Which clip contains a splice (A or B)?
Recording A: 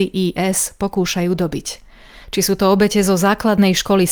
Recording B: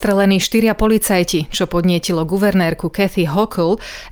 A